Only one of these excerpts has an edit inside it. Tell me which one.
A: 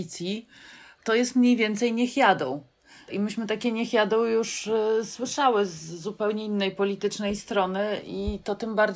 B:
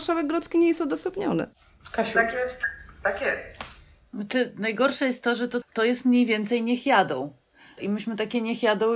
B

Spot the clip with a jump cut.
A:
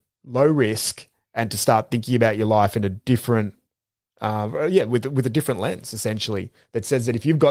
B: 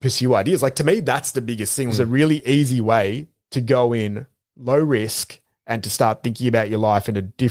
B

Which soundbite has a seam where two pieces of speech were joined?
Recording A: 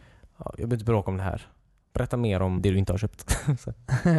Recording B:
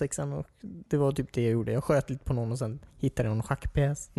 A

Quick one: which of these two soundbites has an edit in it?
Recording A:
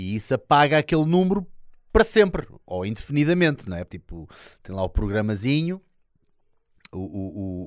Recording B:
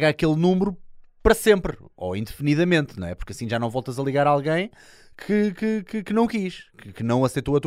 A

